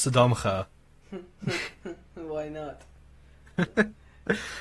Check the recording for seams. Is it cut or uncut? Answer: uncut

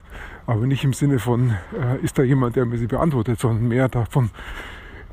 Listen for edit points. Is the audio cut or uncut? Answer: uncut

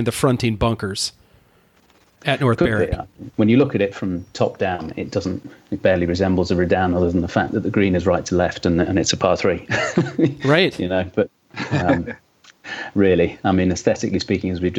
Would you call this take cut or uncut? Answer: cut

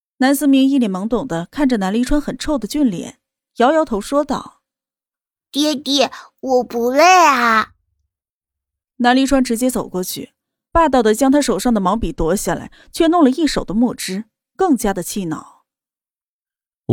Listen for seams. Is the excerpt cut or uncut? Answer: uncut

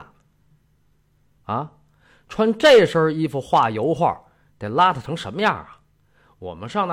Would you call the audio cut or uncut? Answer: cut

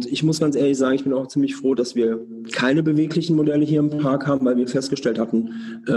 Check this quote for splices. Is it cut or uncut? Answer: uncut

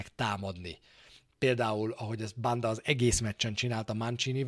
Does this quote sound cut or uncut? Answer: uncut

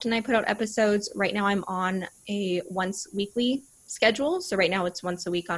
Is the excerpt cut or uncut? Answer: uncut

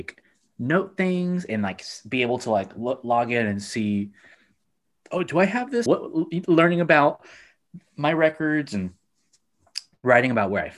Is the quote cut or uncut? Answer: cut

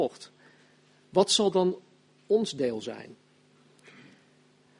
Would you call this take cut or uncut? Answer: uncut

